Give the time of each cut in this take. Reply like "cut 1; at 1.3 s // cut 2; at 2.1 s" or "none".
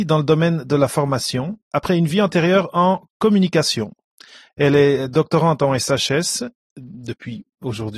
none